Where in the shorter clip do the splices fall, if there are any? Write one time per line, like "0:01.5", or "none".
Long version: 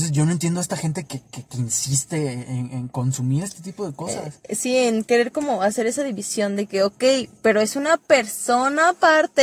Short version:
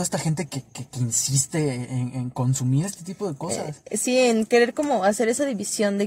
none